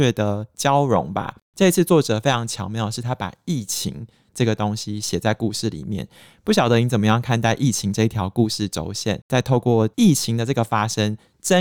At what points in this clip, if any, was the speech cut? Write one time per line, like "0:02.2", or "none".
none